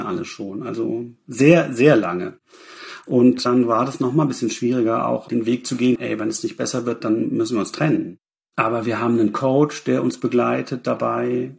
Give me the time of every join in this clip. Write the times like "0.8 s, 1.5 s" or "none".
6.0 s